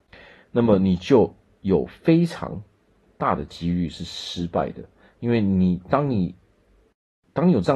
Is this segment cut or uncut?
uncut